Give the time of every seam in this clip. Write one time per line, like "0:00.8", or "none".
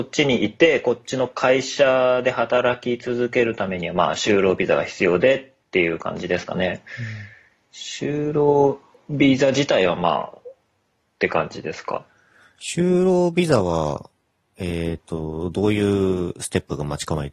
none